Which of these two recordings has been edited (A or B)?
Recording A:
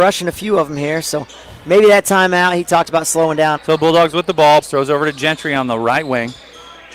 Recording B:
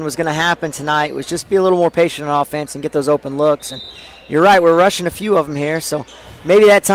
A